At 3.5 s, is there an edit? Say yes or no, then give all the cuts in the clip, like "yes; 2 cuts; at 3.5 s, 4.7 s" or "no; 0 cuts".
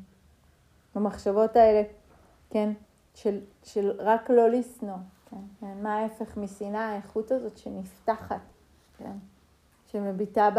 yes; 3 cuts; at 3.5 s, 5.5 s, 8.8 s